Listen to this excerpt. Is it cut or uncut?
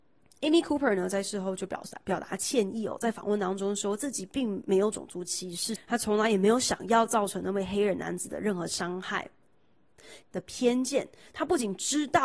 cut